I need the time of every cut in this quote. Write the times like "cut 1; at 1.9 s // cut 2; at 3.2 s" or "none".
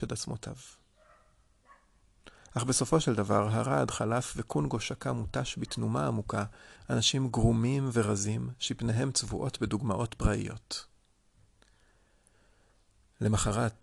cut 1; at 6.8 s